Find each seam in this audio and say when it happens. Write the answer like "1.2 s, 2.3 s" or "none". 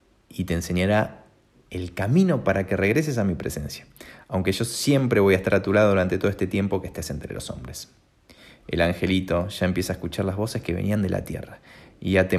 none